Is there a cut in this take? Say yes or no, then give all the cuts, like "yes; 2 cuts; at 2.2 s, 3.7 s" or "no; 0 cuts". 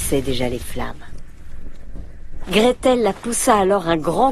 yes; 1 cut; at 2.4 s